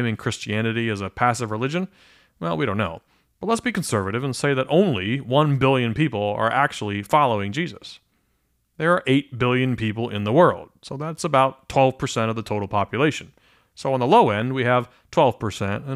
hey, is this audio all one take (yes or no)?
yes